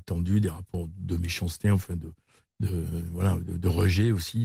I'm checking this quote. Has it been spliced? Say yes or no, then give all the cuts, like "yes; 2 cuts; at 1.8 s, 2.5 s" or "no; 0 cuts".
no; 0 cuts